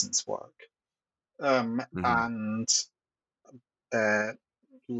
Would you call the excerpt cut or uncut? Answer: cut